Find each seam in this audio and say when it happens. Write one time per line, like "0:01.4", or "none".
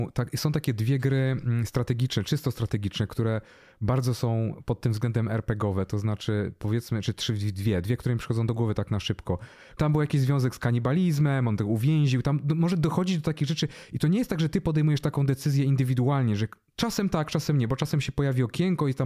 0:09.8